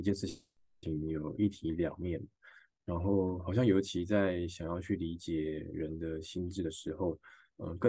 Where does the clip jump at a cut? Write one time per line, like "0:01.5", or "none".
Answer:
none

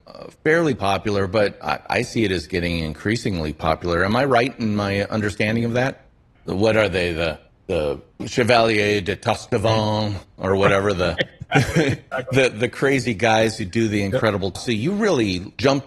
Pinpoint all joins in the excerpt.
0:06.4
0:14.6

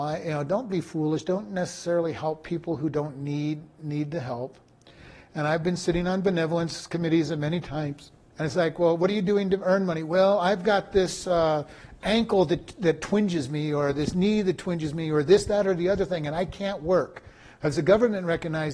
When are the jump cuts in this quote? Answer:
0:08.3

